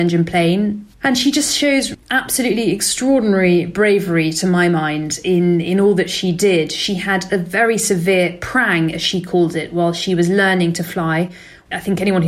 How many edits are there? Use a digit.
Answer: 1